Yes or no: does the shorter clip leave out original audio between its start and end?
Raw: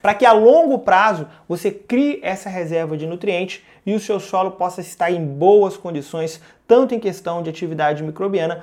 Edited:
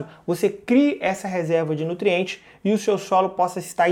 no